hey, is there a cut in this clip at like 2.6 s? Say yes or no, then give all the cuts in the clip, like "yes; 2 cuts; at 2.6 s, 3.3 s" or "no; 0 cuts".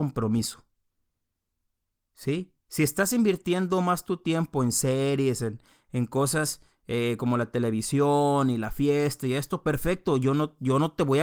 no; 0 cuts